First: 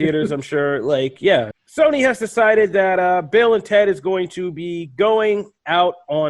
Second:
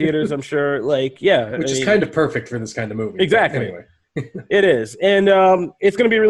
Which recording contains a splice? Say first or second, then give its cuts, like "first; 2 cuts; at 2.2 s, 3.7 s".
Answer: first; 1 cut; at 1.5 s